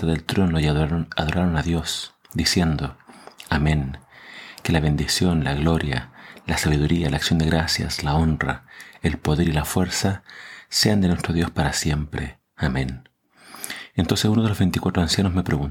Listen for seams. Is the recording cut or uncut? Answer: cut